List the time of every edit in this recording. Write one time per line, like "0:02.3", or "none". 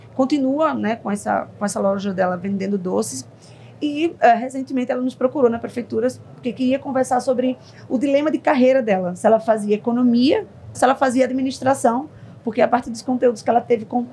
0:10.7